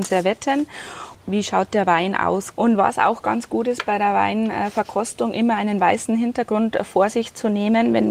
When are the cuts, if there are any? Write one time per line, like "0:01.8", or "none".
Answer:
0:01.1
0:02.5